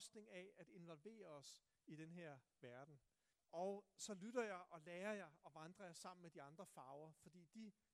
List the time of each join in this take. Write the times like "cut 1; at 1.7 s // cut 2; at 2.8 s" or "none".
cut 1; at 3.3 s